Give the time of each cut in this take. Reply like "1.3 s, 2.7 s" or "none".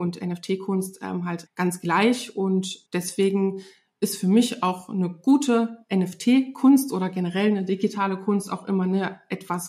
1.5 s, 2.9 s